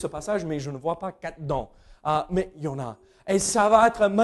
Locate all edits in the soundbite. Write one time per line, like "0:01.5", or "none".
none